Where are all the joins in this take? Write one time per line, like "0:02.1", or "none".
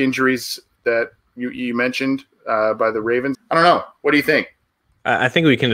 0:03.3